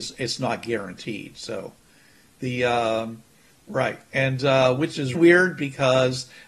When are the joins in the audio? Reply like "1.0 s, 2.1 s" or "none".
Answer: 3.5 s, 5.1 s

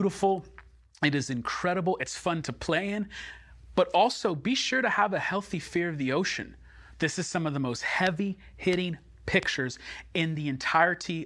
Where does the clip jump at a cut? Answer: 6.9 s

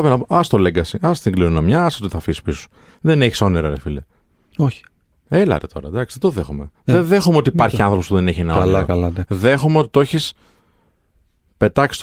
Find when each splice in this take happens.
none

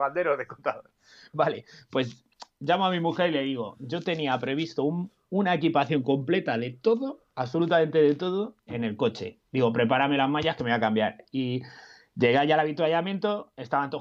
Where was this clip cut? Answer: 8.7 s

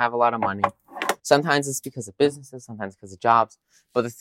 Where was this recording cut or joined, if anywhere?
1.2 s

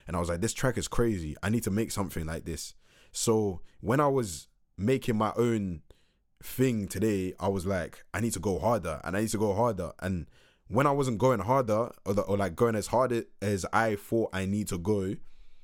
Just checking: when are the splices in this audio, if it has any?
none

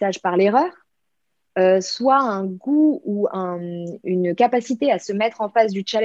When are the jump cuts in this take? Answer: none

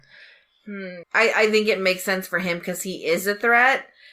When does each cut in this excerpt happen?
1.0 s

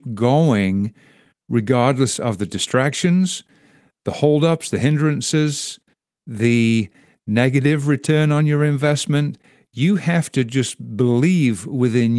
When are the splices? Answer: none

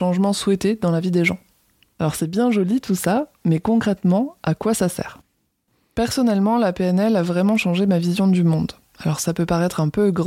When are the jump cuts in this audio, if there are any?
none

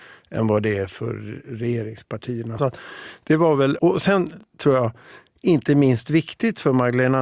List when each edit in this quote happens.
2.6 s, 3.8 s

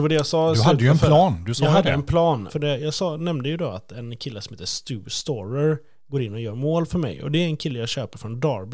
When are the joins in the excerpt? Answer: 2.5 s

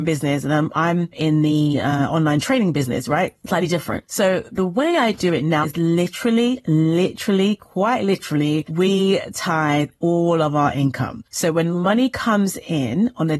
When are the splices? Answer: 5.6 s

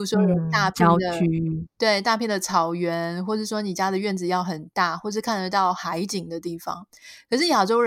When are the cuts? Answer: none

